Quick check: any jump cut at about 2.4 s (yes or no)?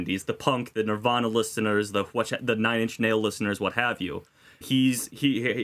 no